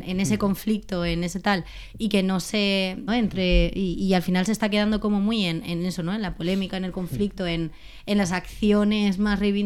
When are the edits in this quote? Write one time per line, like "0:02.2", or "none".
0:03.1